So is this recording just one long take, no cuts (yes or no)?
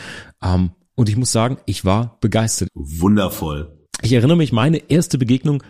no